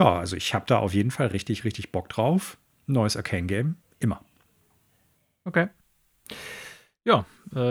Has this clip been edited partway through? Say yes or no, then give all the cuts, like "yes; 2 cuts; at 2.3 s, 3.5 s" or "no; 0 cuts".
no; 0 cuts